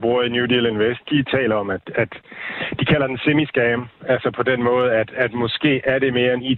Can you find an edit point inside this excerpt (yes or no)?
yes